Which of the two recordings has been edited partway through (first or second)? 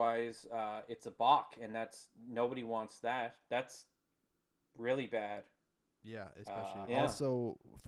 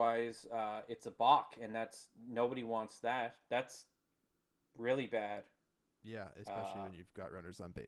first